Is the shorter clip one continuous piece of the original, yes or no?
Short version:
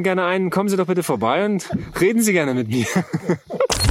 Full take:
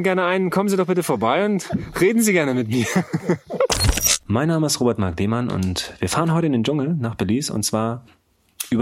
yes